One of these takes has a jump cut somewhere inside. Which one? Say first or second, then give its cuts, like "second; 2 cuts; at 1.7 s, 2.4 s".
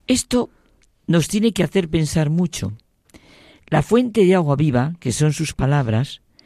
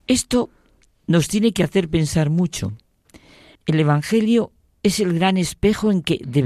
second; 1 cut; at 3.6 s